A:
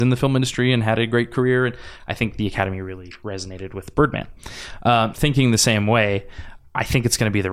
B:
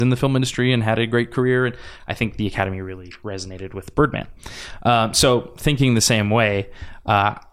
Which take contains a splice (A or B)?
A